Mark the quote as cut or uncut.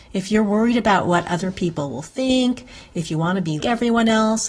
cut